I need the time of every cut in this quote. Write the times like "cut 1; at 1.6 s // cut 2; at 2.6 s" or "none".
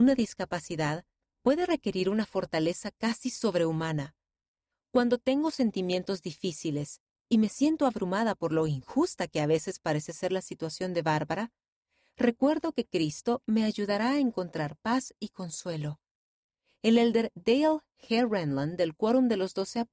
cut 1; at 4.7 s